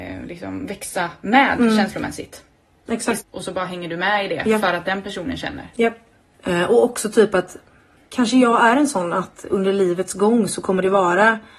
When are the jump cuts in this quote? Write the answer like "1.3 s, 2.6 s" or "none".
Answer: 3.2 s, 6.3 s, 8.0 s